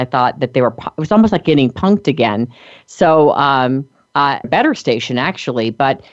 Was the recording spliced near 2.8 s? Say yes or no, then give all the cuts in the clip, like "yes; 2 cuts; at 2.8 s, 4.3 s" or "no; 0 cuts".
no; 1 cut; at 4.4 s